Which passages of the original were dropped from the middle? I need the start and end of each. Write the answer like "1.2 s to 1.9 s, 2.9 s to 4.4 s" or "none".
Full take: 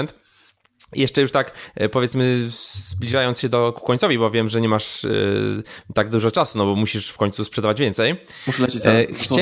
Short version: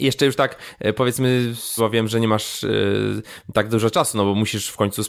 2.7 s to 4.2 s